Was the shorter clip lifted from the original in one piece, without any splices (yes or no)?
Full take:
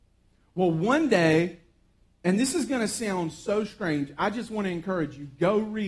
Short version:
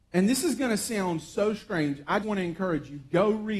no